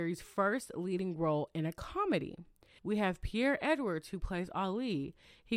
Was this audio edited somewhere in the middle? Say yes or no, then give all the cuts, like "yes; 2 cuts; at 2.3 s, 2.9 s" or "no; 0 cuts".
yes; 1 cut; at 2.8 s